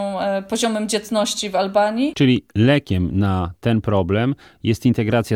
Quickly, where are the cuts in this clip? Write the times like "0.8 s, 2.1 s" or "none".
2.1 s